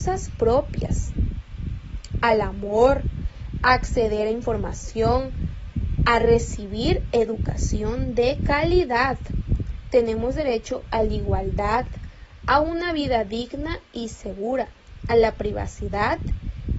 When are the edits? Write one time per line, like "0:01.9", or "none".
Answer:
0:15.0